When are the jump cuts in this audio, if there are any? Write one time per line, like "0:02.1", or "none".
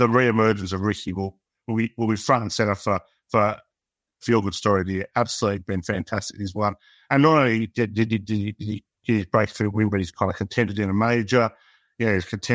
none